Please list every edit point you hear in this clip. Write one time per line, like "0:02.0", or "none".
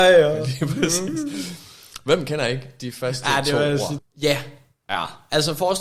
0:04.0